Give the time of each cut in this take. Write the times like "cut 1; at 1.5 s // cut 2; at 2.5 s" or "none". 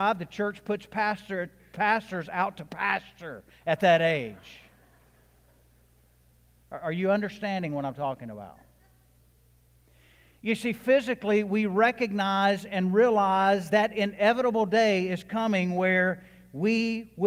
cut 1; at 13.7 s